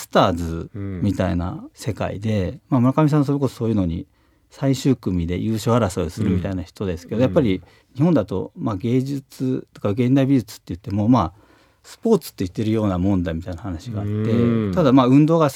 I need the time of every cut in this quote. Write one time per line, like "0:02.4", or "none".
none